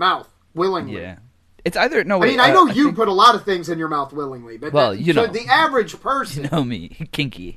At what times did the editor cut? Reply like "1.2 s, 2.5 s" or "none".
none